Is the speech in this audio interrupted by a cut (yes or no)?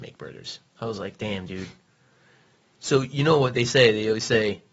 no